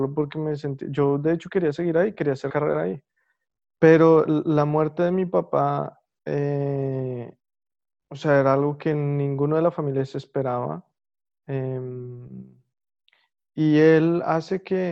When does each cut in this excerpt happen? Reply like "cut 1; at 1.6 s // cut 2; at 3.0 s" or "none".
none